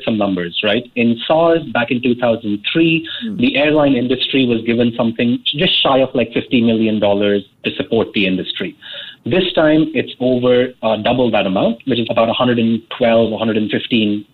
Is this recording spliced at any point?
yes; 1 cut; at 12.0 s

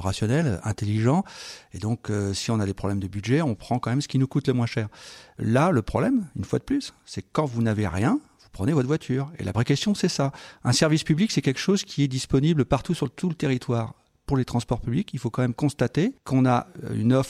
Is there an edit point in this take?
no; 0 cuts

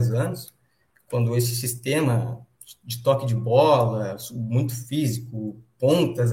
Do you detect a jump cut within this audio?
no; 0 cuts

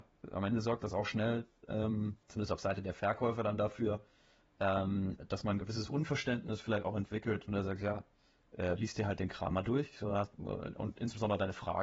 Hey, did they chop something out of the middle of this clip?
yes; 1 cut; at 2.2 s

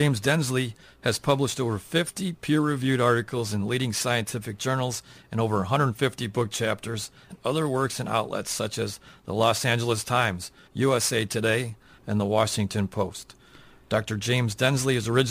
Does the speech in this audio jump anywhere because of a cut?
yes; 3 cuts; at 7.3 s, 10.7 s, 12.0 s

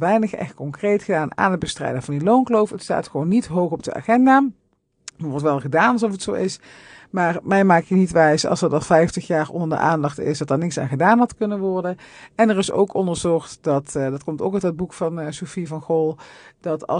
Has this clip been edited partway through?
no; 0 cuts

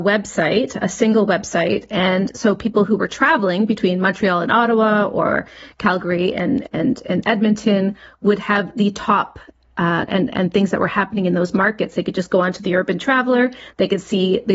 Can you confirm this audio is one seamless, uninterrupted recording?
no; 1 cut; at 10.1 s

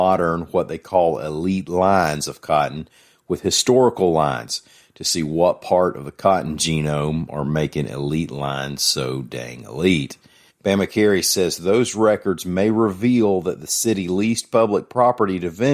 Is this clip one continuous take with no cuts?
no; 1 cut; at 10.5 s

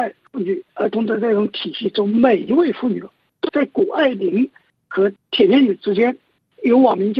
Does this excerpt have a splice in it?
yes; 1 cut; at 3.5 s

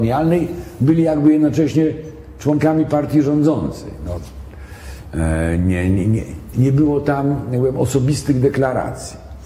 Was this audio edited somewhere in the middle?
yes; 1 cut; at 6.5 s

